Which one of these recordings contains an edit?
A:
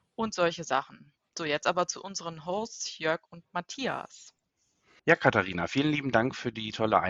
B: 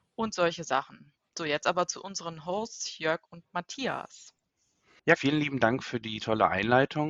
B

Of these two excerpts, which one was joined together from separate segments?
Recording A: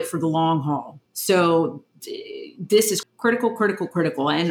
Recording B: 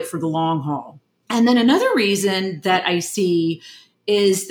A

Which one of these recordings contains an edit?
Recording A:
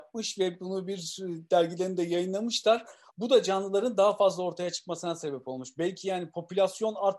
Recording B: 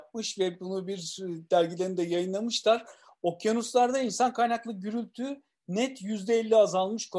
A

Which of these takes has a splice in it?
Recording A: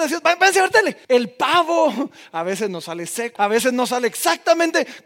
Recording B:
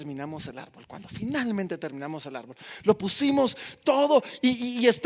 A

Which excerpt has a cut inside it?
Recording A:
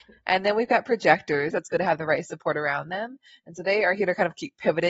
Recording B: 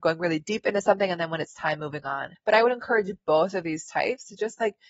A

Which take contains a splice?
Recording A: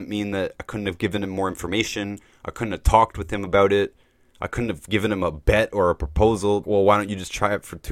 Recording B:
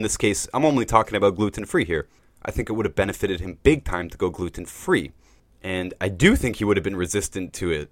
A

